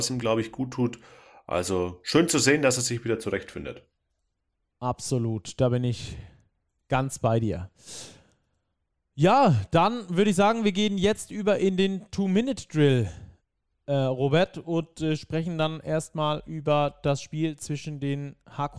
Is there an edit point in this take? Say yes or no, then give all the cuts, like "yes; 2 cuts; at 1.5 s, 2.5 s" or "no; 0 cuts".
no; 0 cuts